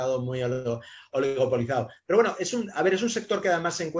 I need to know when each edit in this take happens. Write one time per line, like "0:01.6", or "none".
none